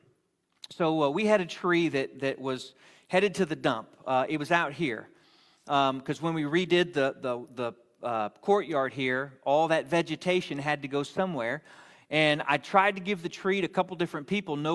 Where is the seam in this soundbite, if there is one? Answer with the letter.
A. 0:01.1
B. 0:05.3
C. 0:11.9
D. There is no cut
D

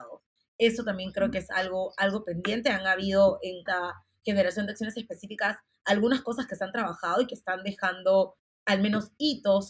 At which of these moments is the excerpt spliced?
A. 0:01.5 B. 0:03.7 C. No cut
B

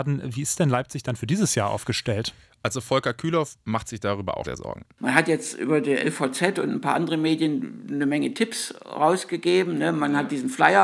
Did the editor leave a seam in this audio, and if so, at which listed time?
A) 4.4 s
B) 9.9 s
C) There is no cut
A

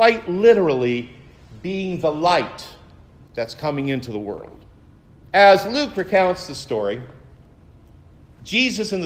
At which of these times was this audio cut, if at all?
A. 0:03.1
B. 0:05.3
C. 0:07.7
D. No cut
B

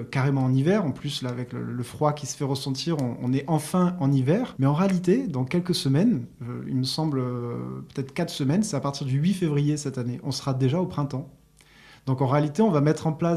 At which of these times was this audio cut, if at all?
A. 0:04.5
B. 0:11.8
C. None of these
A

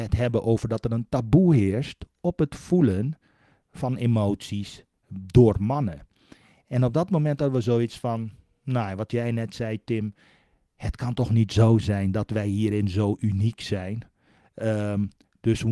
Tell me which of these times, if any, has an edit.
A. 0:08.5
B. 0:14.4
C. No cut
C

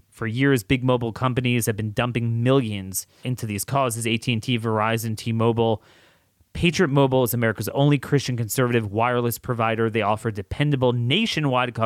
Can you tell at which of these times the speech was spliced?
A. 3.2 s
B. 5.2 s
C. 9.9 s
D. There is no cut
A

